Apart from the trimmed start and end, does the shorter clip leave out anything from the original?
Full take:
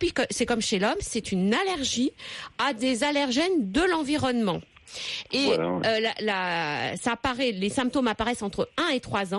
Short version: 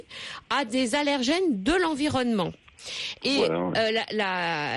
no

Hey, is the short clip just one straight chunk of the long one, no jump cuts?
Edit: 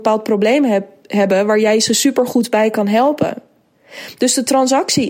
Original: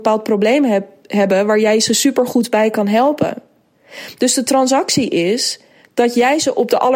yes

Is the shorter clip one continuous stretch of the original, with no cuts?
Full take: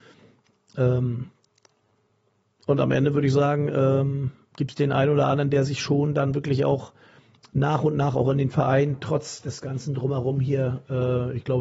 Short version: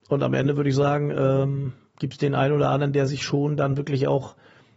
yes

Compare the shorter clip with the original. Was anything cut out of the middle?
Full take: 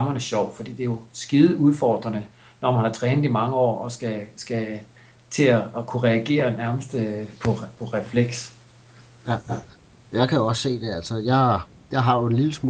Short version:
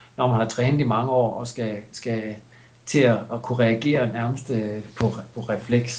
no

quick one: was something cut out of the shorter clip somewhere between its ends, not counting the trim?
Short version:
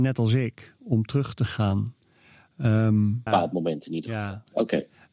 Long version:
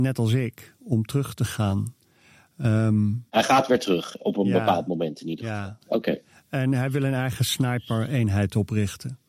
yes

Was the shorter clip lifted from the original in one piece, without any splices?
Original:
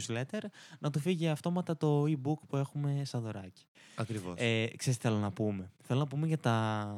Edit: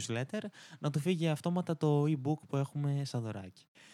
yes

